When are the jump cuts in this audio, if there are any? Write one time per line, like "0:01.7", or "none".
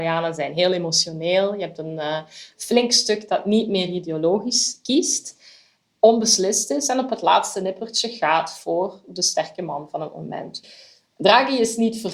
none